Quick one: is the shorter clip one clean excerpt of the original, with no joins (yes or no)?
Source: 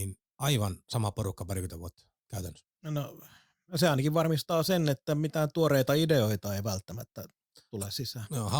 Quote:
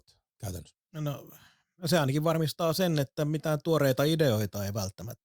yes